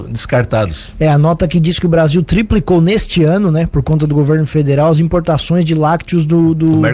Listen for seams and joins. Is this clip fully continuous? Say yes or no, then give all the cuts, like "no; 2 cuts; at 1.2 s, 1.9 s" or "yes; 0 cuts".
yes; 0 cuts